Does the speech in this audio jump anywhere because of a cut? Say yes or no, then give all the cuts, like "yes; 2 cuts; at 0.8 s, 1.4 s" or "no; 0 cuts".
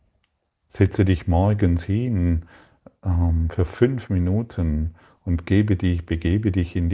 no; 0 cuts